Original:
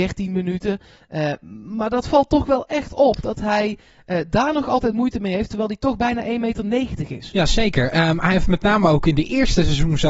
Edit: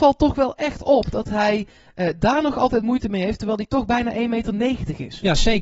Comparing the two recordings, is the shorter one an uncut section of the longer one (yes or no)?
yes